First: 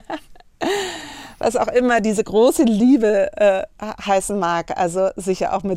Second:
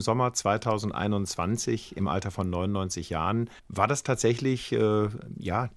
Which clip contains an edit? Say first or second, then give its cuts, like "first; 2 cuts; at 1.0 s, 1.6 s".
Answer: second; 1 cut; at 3.6 s